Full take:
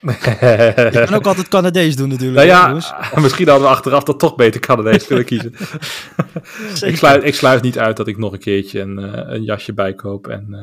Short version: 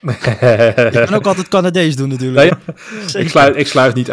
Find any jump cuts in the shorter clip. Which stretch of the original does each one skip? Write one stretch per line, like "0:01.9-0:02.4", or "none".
0:02.5-0:06.1